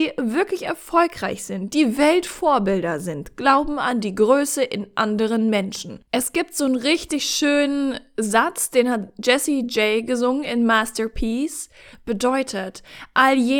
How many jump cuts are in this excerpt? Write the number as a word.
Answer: two